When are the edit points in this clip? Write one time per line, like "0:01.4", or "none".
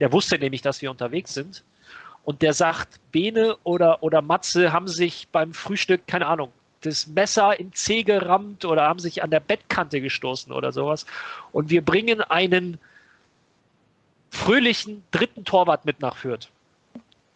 none

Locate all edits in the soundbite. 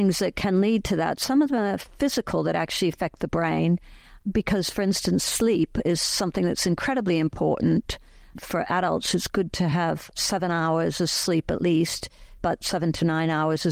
0:12.4

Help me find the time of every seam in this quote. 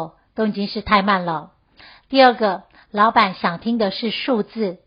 none

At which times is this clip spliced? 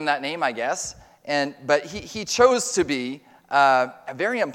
none

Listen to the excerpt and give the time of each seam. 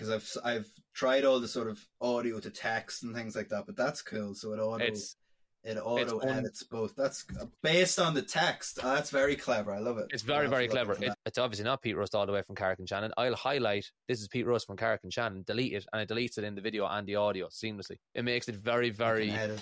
0:11.1
0:18.1

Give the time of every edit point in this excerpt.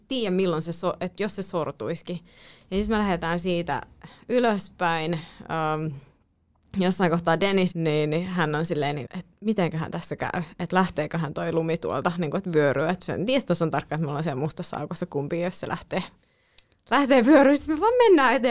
0:07.7
0:09.1

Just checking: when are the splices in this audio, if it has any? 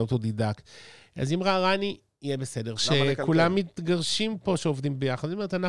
0:02.8

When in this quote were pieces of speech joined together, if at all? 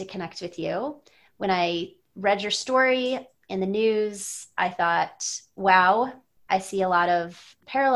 none

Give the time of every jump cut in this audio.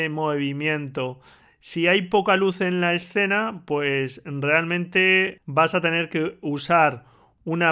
none

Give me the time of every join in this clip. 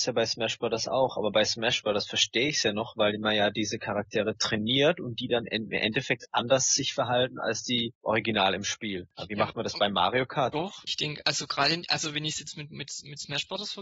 0:10.5

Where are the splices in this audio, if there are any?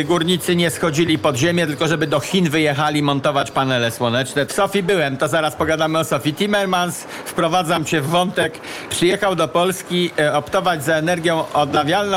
0:04.5

